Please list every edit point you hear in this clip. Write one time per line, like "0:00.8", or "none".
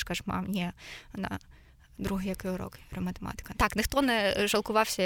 0:03.5